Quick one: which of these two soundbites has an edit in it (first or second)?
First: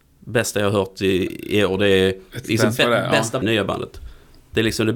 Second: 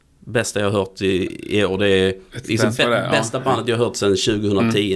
first